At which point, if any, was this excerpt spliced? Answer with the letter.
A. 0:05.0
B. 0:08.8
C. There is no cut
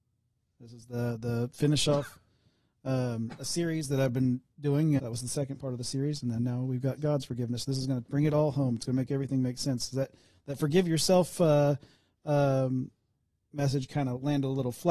A